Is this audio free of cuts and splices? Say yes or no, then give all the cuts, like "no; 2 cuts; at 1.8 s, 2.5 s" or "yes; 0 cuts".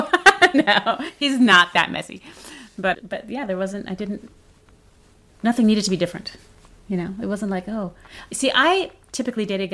yes; 0 cuts